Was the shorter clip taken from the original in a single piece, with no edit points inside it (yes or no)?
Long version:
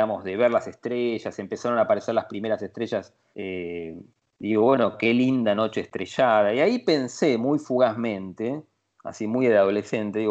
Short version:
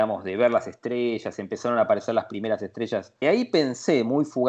no